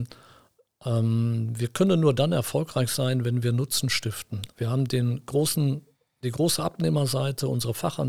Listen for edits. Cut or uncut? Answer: cut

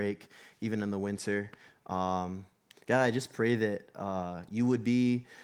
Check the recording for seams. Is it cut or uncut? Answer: uncut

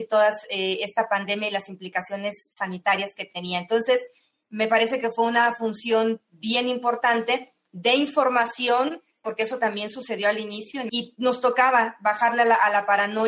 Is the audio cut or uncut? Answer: cut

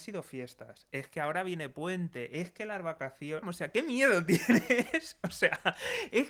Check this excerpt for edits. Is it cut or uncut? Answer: cut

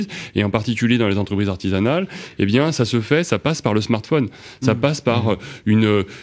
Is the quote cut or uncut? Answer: uncut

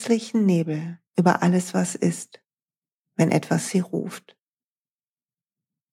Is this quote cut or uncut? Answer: cut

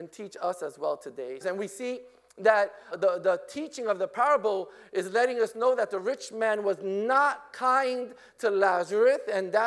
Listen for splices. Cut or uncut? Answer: cut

